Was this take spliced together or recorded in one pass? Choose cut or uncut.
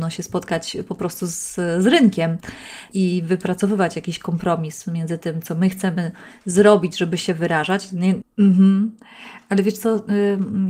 cut